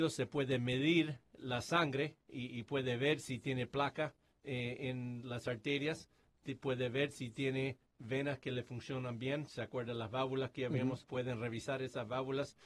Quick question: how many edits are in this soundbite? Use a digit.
1